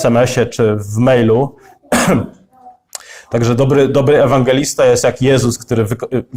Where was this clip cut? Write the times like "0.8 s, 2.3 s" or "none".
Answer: none

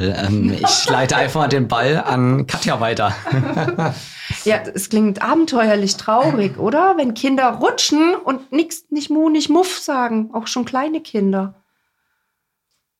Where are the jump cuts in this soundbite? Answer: 4.9 s

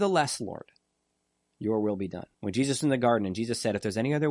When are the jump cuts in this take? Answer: 2.3 s

